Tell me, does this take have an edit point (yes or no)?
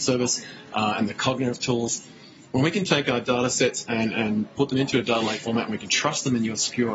no